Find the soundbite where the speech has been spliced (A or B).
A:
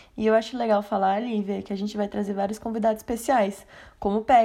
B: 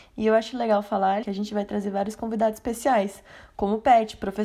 B